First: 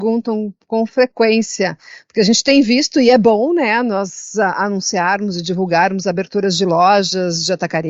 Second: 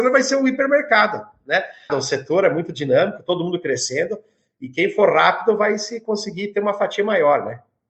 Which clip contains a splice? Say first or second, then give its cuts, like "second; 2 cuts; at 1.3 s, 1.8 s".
second; 1 cut; at 1.9 s